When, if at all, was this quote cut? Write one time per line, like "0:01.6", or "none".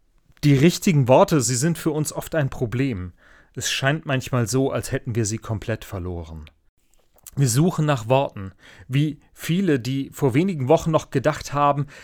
none